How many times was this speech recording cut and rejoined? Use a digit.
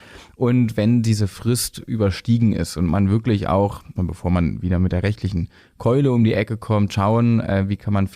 1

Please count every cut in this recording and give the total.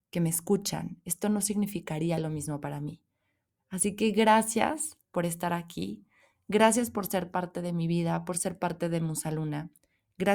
1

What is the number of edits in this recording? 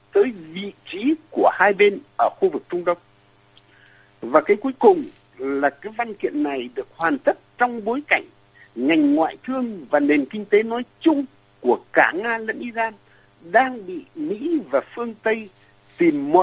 0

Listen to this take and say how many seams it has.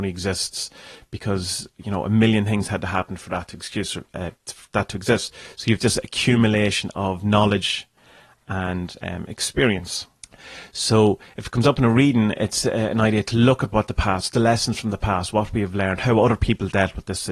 0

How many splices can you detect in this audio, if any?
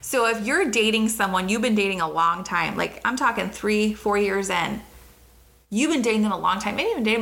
0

